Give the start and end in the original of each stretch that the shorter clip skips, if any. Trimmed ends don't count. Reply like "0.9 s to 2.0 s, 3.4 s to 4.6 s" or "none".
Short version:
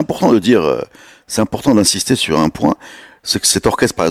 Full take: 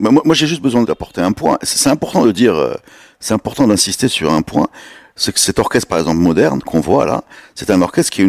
none